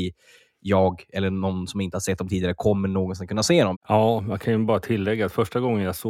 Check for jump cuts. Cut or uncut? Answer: cut